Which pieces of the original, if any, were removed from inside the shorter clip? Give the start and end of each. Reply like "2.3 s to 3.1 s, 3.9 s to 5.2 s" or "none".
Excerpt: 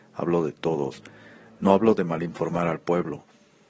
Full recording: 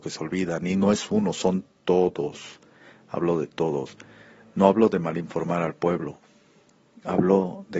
none